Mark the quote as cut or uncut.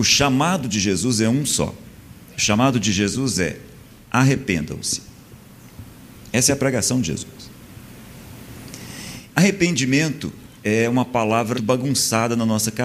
cut